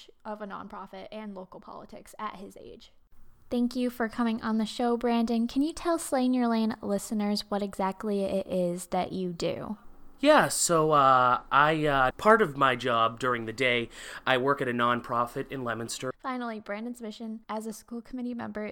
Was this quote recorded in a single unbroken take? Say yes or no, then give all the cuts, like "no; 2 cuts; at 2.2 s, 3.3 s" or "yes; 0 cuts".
no; 3 cuts; at 12.1 s, 16.1 s, 17.4 s